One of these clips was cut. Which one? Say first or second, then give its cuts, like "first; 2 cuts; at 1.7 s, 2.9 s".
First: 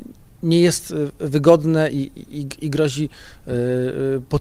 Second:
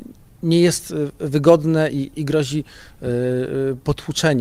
second; 1 cut; at 2.1 s